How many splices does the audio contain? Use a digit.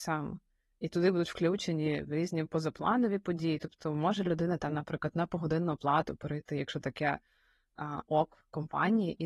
0